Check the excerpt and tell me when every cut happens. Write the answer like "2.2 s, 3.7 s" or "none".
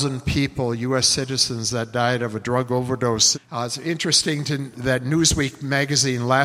3.3 s, 4.7 s